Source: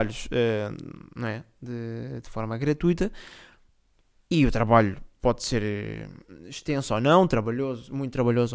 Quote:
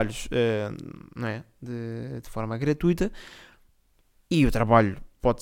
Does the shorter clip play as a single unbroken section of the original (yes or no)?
yes